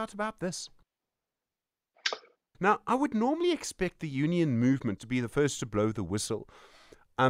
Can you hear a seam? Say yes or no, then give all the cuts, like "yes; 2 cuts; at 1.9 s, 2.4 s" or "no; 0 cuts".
yes; 2 cuts; at 2.5 s, 5.0 s